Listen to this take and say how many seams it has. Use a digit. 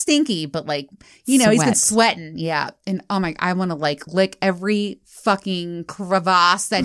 0